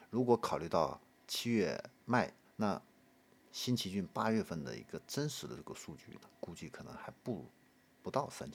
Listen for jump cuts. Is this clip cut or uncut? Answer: cut